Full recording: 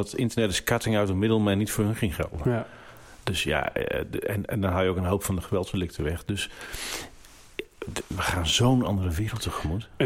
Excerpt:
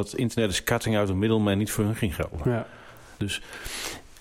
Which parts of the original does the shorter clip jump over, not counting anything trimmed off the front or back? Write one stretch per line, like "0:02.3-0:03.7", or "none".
0:03.2-0:06.3